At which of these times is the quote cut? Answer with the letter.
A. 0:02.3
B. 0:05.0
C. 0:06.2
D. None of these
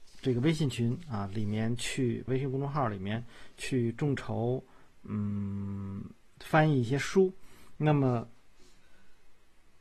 A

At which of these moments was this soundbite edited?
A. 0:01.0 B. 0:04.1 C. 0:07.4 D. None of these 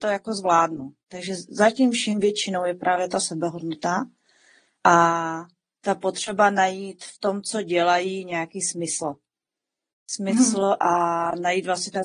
A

